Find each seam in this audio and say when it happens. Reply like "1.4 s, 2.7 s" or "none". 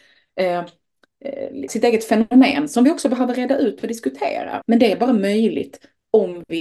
1.7 s, 4.6 s